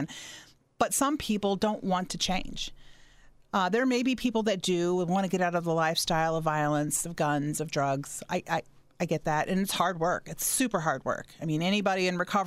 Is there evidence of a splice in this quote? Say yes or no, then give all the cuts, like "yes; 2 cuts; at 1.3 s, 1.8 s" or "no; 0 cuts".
no; 0 cuts